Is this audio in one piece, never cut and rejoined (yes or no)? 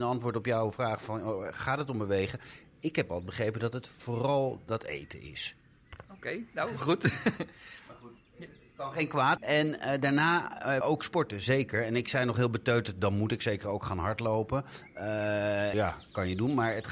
no